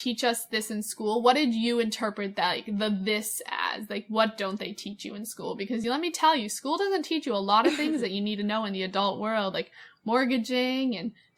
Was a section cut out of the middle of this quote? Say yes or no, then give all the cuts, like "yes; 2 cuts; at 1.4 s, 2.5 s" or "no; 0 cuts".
no; 0 cuts